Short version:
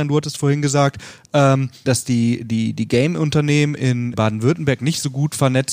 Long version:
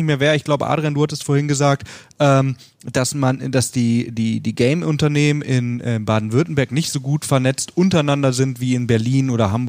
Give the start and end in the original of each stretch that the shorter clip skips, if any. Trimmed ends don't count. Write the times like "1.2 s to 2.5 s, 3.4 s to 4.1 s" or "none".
2.7 s to 3.5 s, 5.8 s to 6.0 s

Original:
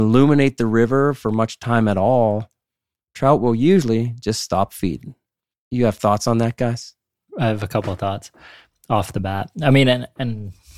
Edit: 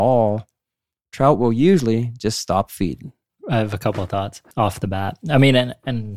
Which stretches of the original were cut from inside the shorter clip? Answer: 5.3 s to 7.2 s, 8.4 s to 8.8 s

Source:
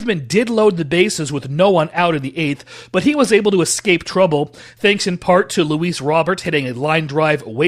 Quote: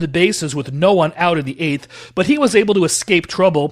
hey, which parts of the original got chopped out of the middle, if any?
none

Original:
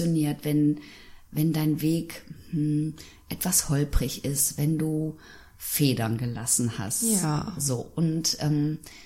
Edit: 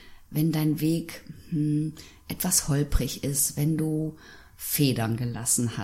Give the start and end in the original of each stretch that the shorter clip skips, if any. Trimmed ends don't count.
none

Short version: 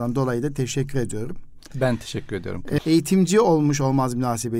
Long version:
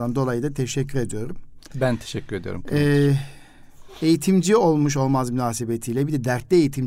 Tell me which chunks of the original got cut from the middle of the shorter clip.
2.8 s to 3.9 s

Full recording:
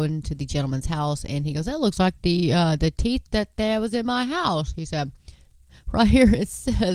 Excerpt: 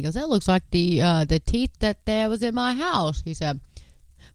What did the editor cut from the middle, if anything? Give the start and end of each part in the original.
none

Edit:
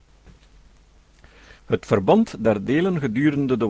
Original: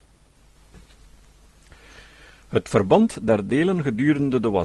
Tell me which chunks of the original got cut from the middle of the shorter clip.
2.0 s to 2.4 s

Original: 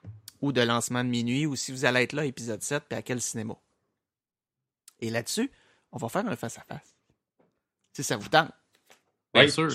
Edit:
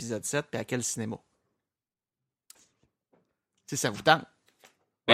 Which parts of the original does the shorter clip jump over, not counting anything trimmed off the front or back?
4.9 s to 6.8 s

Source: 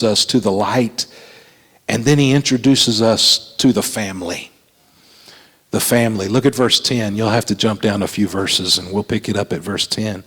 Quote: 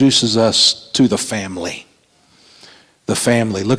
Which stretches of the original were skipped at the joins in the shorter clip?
none

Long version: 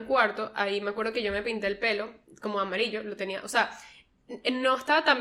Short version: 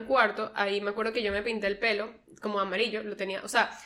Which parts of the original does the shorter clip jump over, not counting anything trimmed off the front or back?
none

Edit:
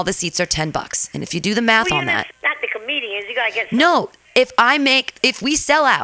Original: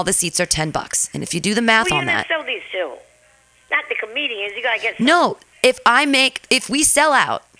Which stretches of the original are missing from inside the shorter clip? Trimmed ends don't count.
2.3 s to 3.5 s

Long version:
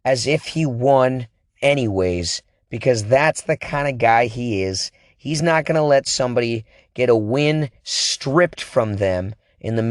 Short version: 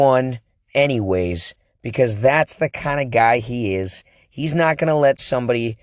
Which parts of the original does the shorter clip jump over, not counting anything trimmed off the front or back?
none

